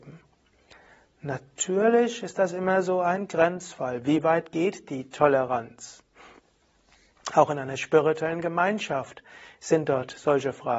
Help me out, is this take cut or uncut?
uncut